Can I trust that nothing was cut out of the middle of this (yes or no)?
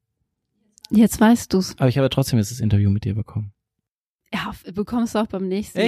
yes